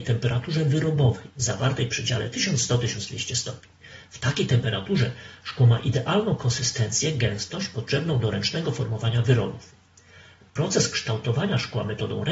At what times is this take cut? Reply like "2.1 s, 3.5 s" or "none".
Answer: none